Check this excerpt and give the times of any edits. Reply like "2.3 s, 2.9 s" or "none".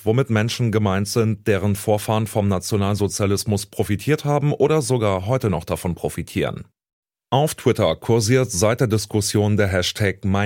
none

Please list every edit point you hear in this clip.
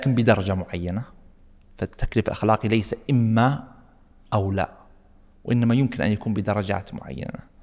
none

